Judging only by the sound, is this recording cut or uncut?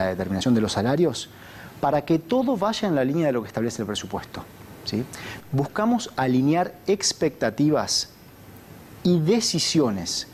cut